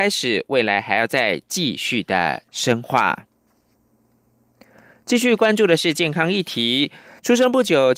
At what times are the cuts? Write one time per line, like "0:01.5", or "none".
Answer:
none